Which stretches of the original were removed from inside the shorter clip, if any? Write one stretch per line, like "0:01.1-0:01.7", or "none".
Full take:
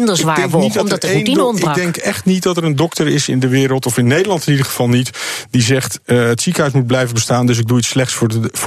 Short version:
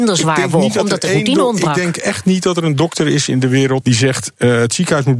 0:03.8-0:05.5